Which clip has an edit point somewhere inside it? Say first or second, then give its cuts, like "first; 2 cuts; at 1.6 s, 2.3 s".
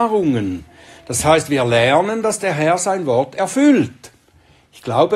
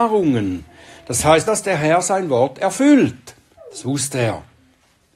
second; 2 cuts; at 1.5 s, 3.6 s